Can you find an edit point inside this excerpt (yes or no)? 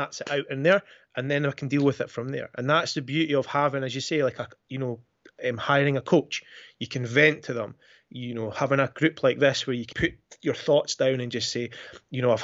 yes